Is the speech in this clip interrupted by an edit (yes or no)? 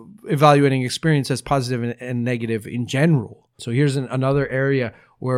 yes